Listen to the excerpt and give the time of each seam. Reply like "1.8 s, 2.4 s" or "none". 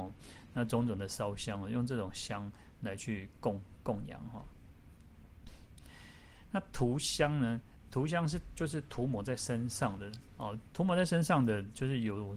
none